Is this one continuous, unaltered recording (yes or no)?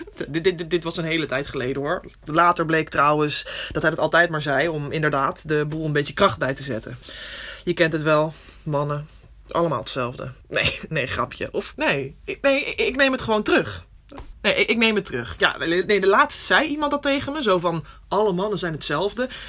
no